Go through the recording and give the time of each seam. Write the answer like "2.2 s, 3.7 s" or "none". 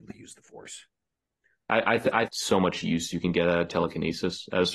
2.3 s

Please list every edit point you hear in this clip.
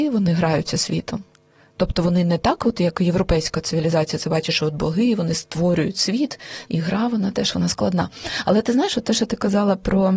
6.6 s

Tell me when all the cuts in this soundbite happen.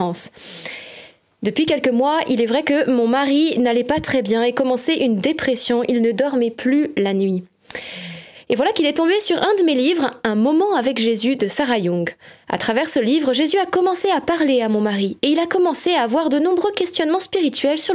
none

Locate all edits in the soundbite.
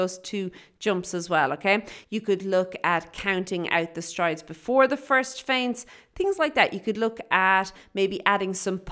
2.0 s

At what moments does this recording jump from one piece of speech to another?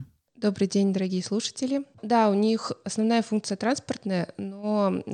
1.9 s

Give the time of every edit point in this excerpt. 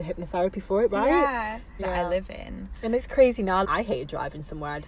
1.8 s, 3.6 s

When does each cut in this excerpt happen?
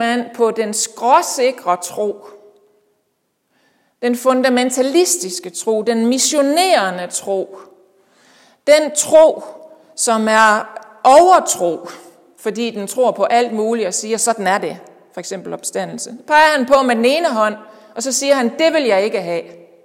none

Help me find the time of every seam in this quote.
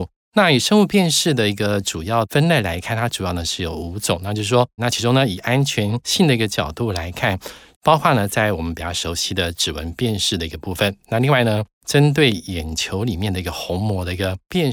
4.8 s, 7.7 s

